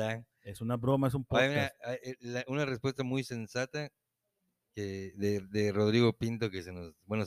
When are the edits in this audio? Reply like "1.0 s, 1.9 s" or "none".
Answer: none